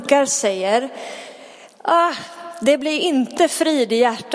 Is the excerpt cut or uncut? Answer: uncut